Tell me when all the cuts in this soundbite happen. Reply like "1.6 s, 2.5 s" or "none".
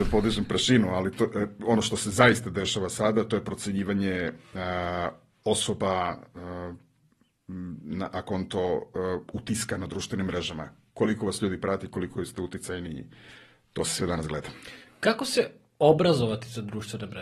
none